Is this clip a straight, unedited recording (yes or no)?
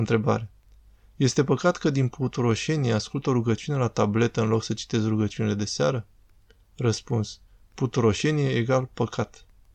yes